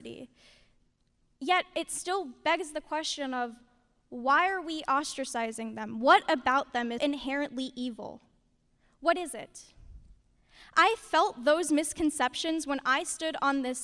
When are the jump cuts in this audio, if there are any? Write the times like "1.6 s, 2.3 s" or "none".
7.0 s